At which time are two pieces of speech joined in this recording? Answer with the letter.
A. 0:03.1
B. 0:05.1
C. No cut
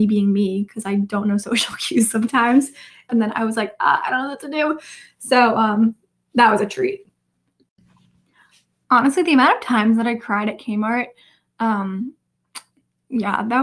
A